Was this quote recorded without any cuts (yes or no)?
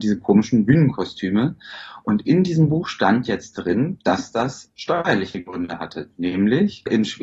yes